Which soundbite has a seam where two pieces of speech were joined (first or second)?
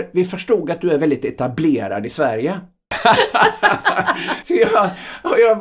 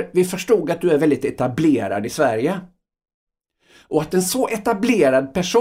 first